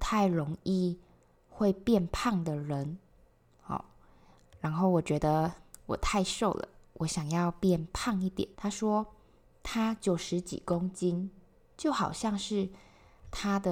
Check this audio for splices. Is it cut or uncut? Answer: cut